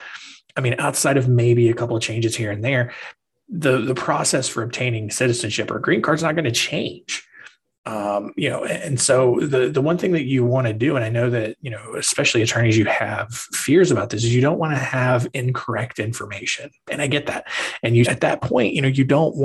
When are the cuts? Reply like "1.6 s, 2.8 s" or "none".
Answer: 18.0 s